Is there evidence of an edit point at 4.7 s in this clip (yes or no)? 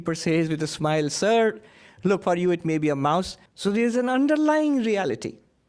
no